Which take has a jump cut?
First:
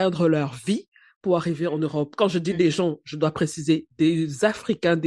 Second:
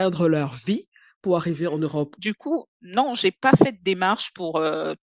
second; 1 cut; at 2.2 s

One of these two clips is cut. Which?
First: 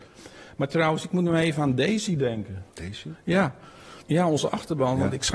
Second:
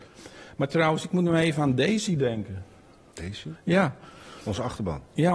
first; 2 cuts; at 2.7 s, 4.0 s

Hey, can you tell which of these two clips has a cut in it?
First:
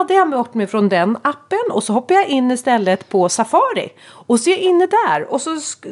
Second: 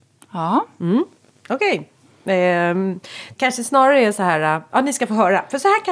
second; 1 cut; at 3.4 s

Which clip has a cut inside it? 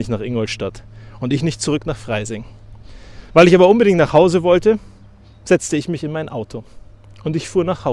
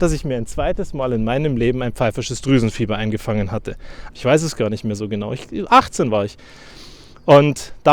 second; 1 cut; at 4.1 s

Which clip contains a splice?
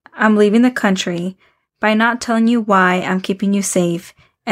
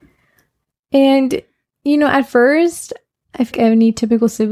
second; 1 cut; at 3.5 s

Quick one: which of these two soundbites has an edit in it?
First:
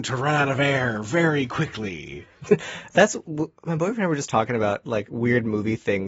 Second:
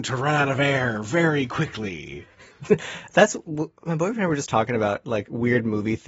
first; 1 cut; at 2.3 s

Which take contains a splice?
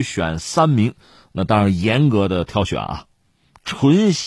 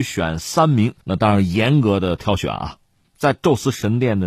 second; 2 cuts; at 1.0 s, 3.0 s

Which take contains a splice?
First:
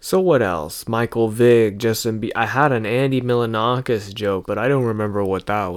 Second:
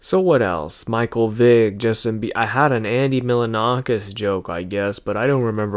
first; 1 cut; at 4.4 s

